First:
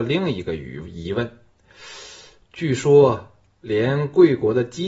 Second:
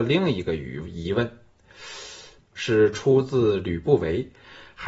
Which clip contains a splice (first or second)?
second